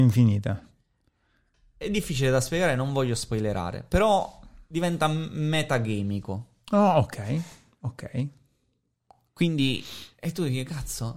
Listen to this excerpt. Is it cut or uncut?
uncut